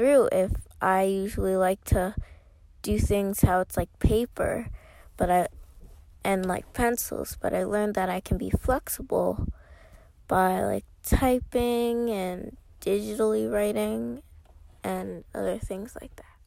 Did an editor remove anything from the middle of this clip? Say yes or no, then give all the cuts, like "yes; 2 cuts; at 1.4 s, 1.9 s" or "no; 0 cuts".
no; 0 cuts